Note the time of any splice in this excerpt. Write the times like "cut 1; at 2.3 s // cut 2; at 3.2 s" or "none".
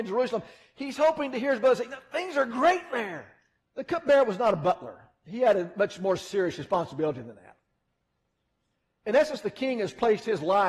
cut 1; at 3.6 s